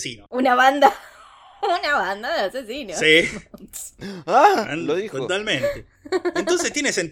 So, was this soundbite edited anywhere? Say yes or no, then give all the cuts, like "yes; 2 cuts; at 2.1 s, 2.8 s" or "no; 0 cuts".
no; 0 cuts